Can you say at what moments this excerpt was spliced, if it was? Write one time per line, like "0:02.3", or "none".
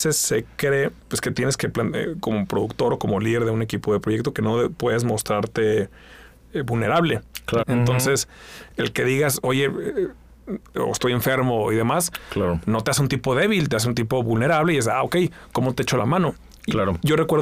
0:01.0
0:07.6
0:10.7